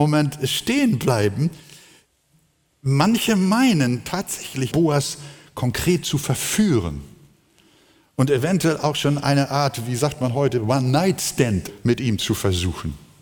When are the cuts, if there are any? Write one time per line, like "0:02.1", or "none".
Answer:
0:04.7

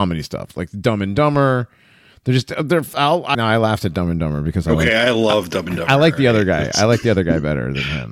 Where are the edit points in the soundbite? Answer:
0:03.3

